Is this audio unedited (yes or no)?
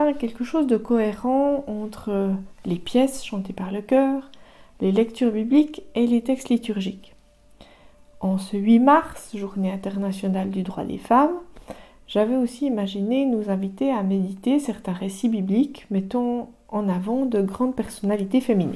yes